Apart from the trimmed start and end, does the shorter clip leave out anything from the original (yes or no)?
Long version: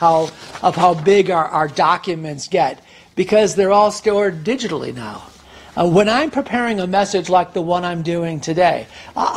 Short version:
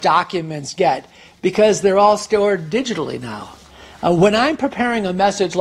no